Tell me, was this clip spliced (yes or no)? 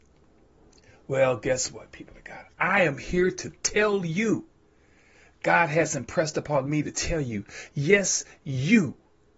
no